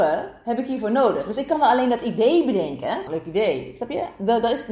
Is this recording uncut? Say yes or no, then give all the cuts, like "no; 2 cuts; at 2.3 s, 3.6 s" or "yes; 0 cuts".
no; 1 cut; at 3.1 s